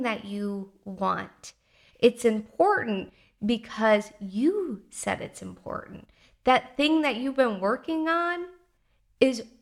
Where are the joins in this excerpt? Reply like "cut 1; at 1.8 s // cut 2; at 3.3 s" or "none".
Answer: cut 1; at 1.9 s